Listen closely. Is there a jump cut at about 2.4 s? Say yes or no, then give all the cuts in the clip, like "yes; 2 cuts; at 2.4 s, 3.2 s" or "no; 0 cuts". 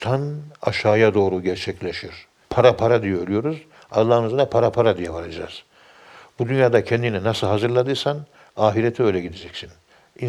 yes; 1 cut; at 2.4 s